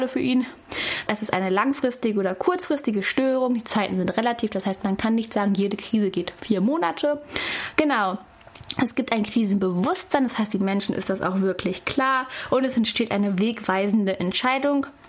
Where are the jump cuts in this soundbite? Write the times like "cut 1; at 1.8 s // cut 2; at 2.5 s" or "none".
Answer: cut 1; at 1.1 s